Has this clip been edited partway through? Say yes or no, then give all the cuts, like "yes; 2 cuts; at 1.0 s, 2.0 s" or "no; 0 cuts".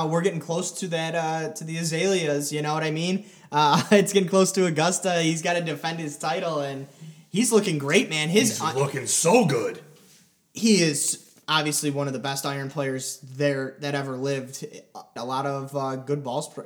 yes; 1 cut; at 15.2 s